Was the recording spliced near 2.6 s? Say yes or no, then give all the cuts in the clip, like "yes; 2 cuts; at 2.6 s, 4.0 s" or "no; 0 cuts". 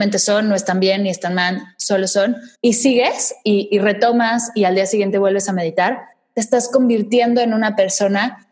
yes; 1 cut; at 2.6 s